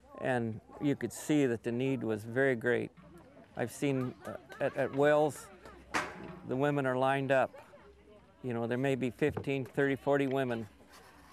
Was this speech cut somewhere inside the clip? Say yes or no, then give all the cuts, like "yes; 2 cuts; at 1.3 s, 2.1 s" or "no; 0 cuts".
yes; 1 cut; at 9.7 s